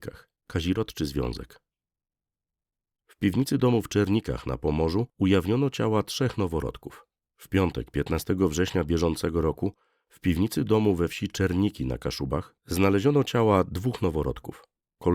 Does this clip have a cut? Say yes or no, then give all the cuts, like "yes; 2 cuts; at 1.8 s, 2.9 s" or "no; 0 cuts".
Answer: yes; 2 cuts; at 7.2 s, 12.6 s